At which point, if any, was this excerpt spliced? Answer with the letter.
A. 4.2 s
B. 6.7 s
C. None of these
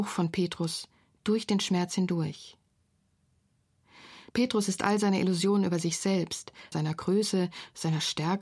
B